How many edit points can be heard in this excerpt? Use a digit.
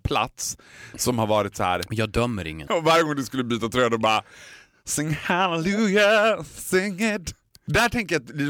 1